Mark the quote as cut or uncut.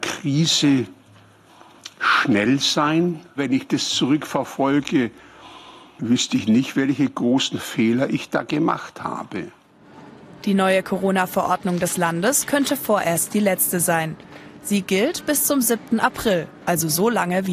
cut